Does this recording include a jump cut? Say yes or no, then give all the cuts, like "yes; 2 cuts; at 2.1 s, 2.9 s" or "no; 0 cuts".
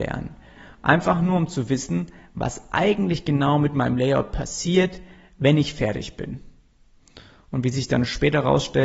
no; 0 cuts